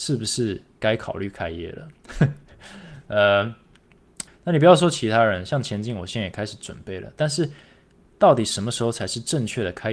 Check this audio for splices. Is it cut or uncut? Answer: cut